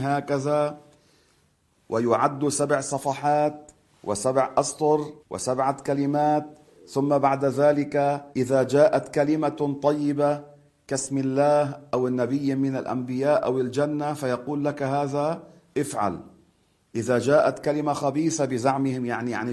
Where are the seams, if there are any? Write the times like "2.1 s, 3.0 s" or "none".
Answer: 5.2 s, 8.3 s